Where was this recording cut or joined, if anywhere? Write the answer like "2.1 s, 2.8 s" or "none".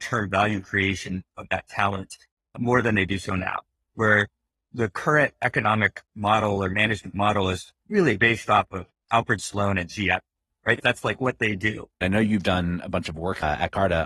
10.8 s, 12.0 s